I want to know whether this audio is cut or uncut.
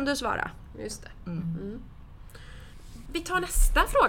cut